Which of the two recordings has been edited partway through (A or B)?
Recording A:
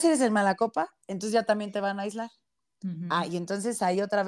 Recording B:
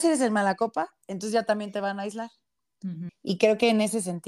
B